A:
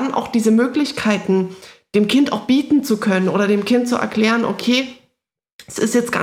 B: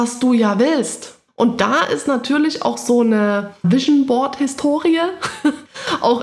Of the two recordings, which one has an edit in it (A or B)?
B